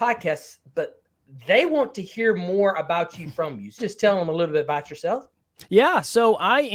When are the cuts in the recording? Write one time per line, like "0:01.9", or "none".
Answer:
0:03.8